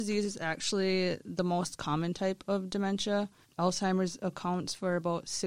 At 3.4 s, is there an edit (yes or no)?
yes